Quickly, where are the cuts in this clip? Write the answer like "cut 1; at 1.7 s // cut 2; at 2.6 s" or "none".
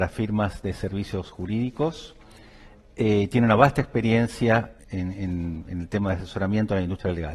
cut 1; at 4.8 s